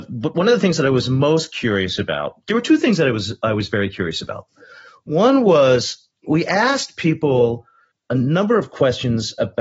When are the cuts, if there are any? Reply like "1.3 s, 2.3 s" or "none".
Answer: none